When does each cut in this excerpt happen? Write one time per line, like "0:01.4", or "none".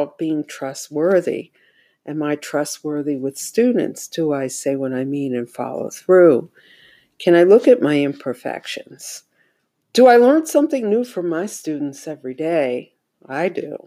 0:09.8